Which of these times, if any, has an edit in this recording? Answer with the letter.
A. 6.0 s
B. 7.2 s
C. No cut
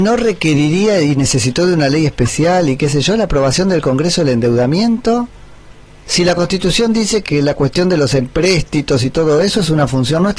B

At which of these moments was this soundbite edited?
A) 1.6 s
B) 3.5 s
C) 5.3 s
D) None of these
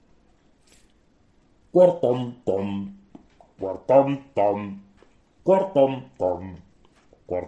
A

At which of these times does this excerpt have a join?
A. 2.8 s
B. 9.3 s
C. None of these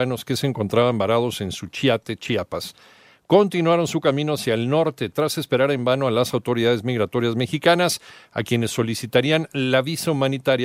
C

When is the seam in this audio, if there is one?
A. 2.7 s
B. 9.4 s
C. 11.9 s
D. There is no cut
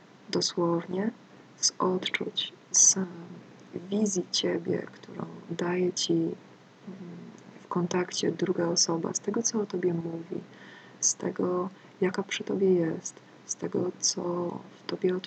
D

